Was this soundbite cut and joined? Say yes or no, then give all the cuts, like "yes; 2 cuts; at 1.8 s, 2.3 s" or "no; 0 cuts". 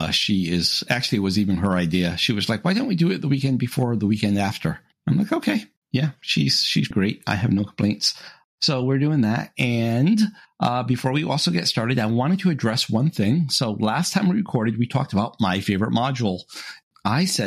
yes; 1 cut; at 6.9 s